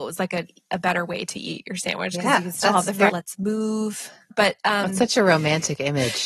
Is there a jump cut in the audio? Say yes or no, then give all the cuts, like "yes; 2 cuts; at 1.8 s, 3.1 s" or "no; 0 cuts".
yes; 2 cuts; at 3.1 s, 4.3 s